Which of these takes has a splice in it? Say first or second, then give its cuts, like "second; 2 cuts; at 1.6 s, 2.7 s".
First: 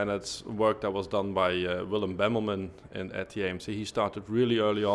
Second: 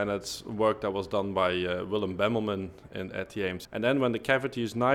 second; 1 cut; at 3.7 s